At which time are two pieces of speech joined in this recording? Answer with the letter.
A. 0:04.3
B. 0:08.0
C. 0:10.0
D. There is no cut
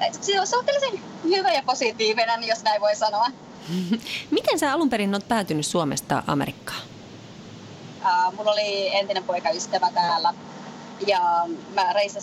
B